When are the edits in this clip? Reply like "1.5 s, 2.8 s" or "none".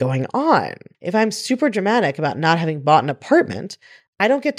0.9 s